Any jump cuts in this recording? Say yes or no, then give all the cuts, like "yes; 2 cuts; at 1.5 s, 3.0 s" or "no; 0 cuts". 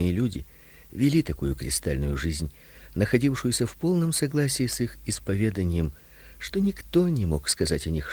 no; 0 cuts